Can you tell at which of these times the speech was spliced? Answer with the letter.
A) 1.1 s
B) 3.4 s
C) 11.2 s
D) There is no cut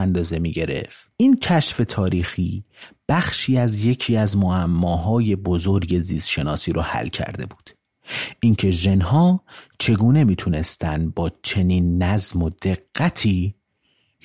A